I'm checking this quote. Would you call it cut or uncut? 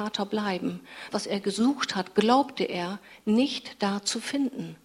cut